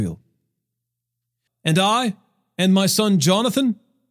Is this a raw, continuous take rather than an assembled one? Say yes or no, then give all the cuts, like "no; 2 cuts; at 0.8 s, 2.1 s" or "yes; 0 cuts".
no; 1 cut; at 1.5 s